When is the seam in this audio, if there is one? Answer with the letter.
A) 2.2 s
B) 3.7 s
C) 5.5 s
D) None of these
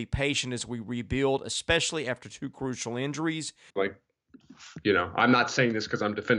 B